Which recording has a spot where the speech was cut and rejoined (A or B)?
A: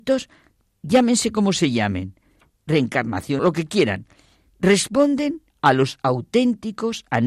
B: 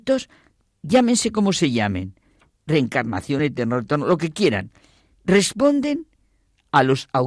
A